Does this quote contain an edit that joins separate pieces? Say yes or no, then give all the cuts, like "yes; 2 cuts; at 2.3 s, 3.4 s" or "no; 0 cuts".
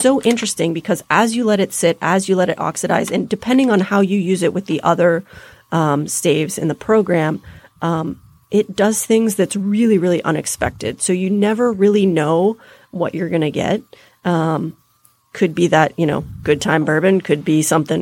no; 0 cuts